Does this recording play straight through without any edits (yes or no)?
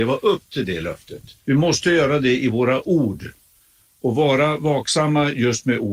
no